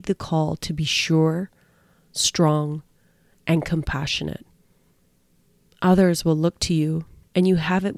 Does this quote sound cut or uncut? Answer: uncut